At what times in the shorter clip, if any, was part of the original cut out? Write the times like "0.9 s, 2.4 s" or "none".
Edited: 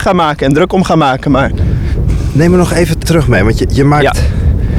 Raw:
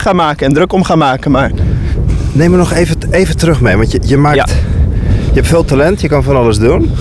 3.0 s